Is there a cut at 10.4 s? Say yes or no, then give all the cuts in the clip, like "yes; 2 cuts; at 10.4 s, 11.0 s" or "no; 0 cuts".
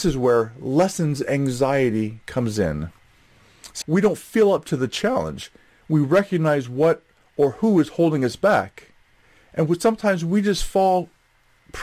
no; 1 cut; at 3.8 s